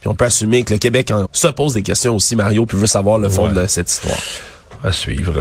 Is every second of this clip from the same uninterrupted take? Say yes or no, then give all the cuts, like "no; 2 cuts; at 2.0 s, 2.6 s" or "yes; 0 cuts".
no; 1 cut; at 1.2 s